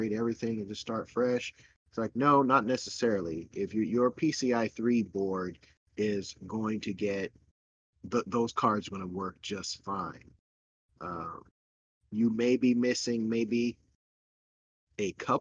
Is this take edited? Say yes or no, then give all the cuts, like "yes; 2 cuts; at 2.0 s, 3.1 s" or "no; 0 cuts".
no; 0 cuts